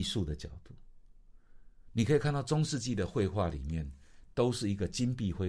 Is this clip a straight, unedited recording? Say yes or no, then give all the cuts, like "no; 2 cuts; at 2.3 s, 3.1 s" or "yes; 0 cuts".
yes; 0 cuts